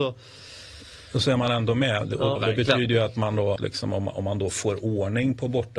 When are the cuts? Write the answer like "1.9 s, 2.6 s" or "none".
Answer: 2.4 s, 3.6 s

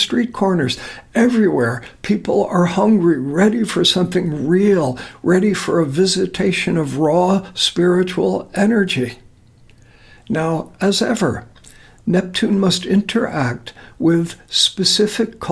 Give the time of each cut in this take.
none

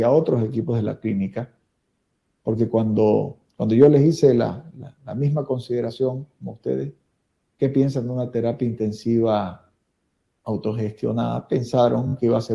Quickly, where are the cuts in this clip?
none

